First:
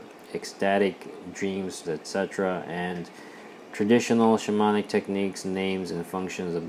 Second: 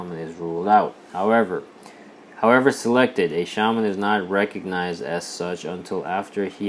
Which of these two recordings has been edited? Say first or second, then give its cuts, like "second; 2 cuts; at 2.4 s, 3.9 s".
first; 1 cut; at 1.8 s